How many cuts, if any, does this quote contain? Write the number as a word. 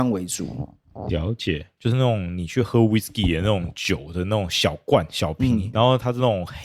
two